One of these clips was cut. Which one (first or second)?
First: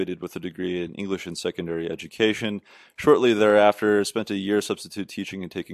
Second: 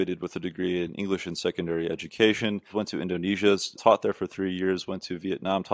second